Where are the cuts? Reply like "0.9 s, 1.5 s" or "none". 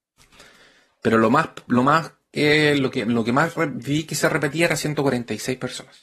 none